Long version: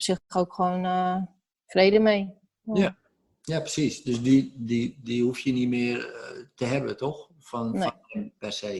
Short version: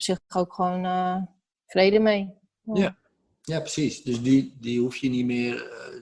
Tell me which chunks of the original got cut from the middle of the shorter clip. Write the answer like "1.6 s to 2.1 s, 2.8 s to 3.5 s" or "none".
4.5 s to 5.0 s